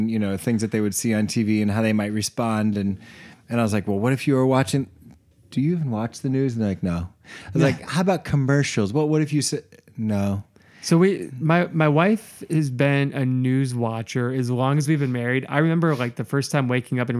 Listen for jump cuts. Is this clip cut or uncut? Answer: uncut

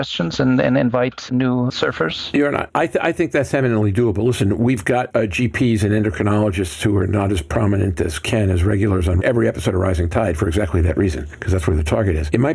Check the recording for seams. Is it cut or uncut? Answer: uncut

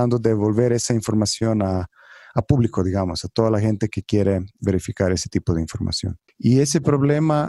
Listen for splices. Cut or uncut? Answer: cut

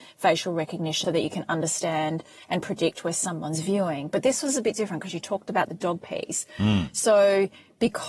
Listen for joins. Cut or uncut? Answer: cut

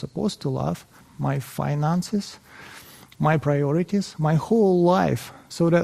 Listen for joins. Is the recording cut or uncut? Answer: cut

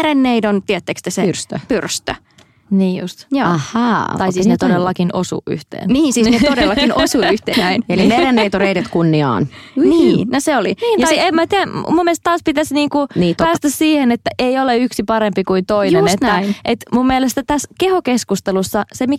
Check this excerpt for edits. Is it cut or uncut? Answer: cut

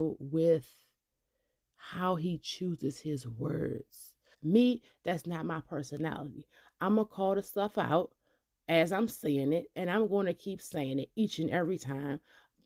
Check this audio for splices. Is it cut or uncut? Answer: cut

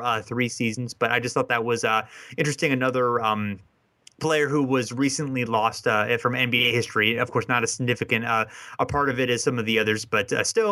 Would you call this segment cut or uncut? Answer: uncut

